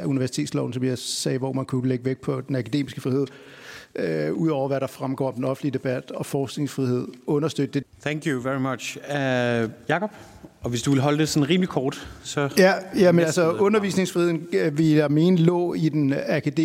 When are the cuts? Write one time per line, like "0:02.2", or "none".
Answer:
0:07.8